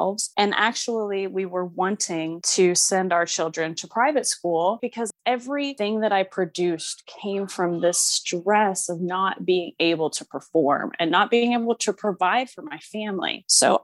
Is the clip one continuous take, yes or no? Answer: no